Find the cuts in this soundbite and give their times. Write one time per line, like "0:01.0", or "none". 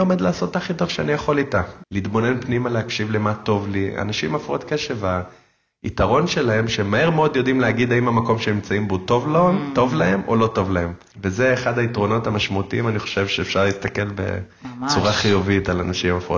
0:01.8
0:11.1